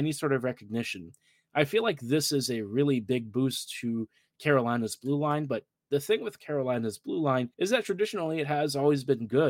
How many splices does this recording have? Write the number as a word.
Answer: one